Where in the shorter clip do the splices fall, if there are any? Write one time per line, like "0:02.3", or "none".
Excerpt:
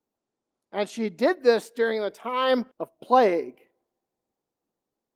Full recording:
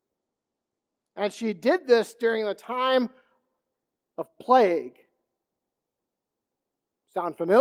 0:02.7